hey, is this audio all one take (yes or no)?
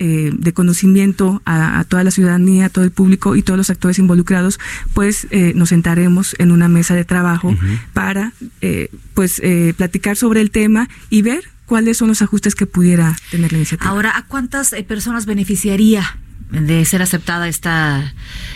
yes